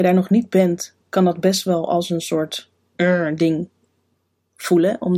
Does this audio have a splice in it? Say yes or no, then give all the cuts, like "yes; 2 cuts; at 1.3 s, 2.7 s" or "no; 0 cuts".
no; 0 cuts